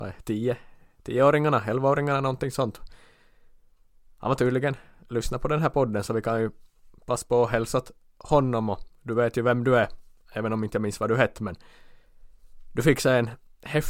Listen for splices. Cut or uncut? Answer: uncut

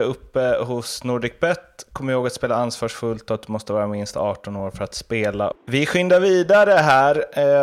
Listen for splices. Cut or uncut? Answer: cut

